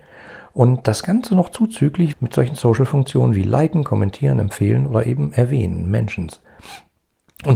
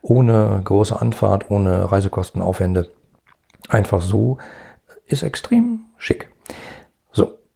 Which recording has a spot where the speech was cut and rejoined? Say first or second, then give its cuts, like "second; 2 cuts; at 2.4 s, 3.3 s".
first; 1 cut; at 2.1 s